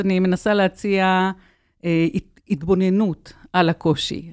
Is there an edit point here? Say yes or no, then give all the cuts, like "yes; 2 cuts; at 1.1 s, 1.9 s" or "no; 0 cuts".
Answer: no; 0 cuts